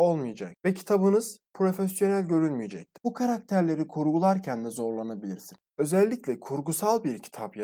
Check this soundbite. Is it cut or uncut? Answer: cut